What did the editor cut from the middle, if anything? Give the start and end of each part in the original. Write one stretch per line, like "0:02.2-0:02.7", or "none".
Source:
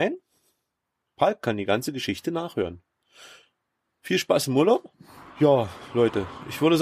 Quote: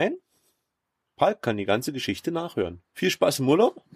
0:02.8-0:03.9